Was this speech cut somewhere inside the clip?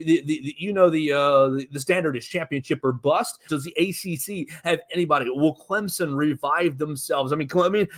yes; 1 cut; at 3.5 s

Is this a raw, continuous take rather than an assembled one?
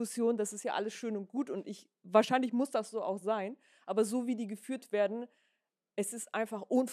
yes; 0 cuts

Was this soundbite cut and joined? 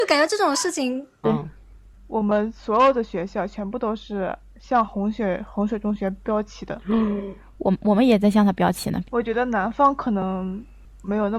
yes; 2 cuts; at 1.2 s, 9.0 s

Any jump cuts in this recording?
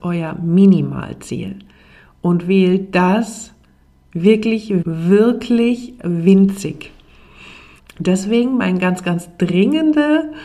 yes; 2 cuts; at 4.8 s, 7.8 s

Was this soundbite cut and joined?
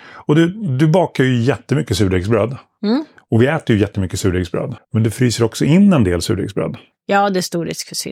yes; 2 cuts; at 4.8 s, 6.9 s

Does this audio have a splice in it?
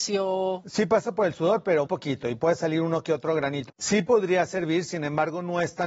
yes; 2 cuts; at 1.9 s, 3.7 s

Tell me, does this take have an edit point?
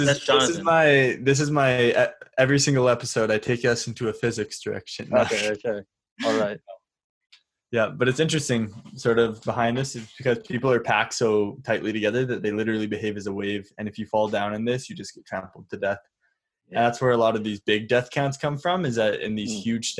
no; 0 cuts

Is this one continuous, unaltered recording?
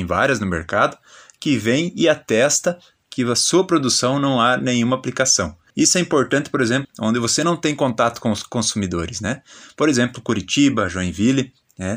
no; 1 cut; at 6.8 s

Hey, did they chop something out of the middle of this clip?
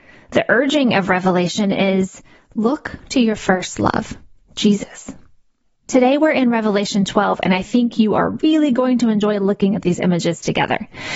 no; 0 cuts

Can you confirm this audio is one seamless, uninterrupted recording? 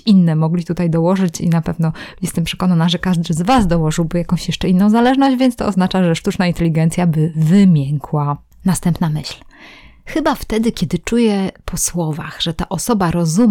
yes; 0 cuts

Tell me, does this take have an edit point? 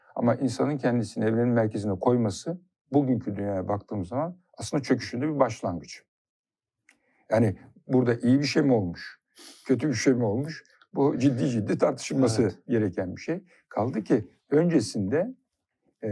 no; 0 cuts

